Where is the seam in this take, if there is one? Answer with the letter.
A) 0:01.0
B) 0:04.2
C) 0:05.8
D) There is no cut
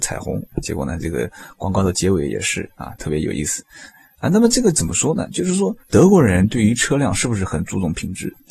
C